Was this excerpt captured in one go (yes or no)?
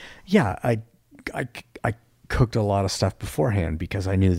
yes